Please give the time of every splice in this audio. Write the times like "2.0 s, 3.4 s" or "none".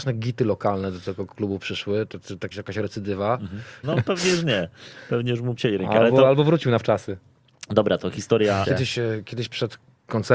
2.5 s, 3.8 s, 8.6 s